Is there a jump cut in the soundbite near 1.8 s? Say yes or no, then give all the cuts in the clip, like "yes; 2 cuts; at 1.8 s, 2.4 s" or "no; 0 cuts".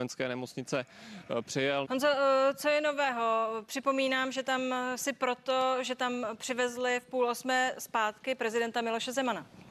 yes; 1 cut; at 1.8 s